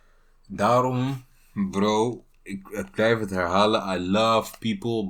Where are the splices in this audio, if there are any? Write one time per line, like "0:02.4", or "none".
0:02.3